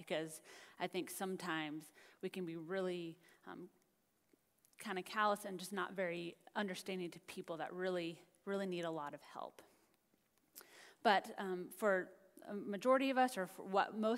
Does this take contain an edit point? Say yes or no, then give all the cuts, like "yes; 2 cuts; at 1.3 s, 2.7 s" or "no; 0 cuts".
no; 0 cuts